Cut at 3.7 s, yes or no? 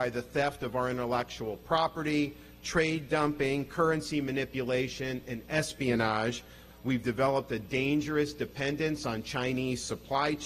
no